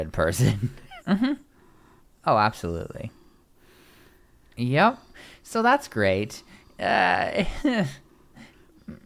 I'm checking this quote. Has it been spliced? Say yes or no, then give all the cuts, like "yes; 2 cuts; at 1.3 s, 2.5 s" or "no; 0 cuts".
yes; 1 cut; at 1.0 s